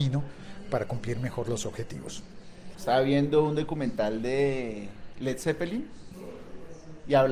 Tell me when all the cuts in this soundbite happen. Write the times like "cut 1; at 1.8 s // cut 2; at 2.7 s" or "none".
cut 1; at 2.7 s